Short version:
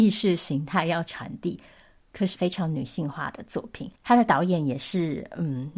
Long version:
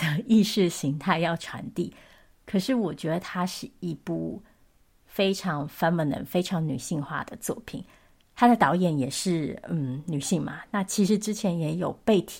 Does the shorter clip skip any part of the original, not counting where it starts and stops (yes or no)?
yes